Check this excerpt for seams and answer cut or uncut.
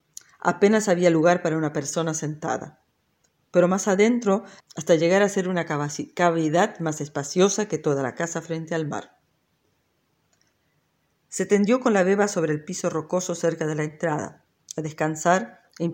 cut